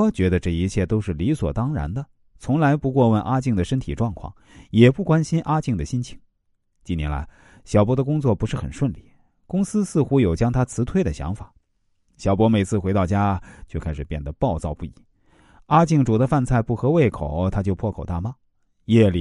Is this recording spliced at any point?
no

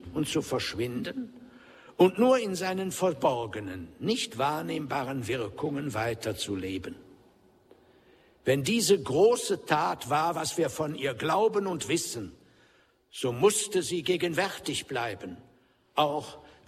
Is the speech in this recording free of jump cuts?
yes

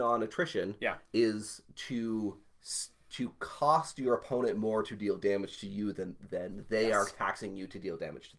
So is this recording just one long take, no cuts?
yes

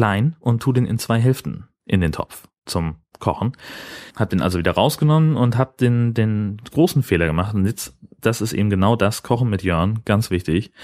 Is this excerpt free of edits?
yes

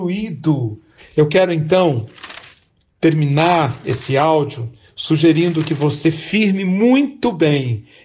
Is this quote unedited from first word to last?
no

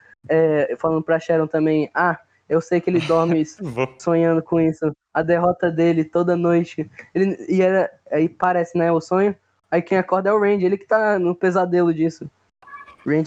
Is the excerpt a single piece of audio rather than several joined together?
yes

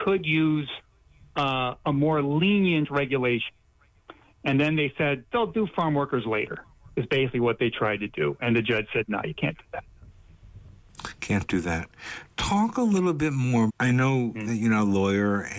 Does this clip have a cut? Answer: yes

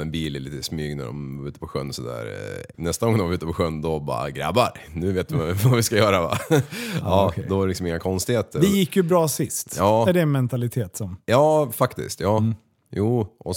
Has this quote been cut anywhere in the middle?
yes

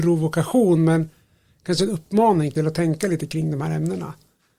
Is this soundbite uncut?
yes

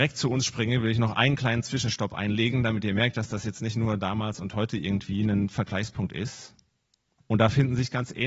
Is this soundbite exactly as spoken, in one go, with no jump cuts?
no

